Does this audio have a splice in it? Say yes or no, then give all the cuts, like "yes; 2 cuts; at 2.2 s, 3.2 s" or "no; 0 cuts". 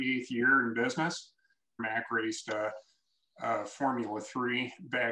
yes; 1 cut; at 1.8 s